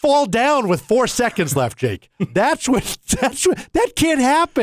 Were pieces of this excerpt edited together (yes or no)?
no